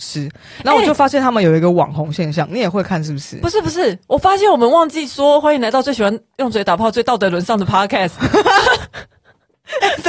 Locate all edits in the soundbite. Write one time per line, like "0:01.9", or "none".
none